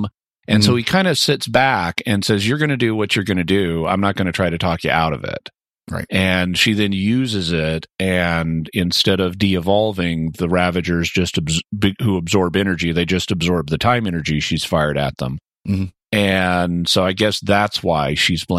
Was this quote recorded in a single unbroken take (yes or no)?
yes